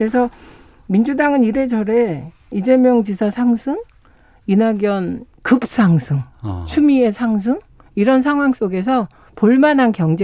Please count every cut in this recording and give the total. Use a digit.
0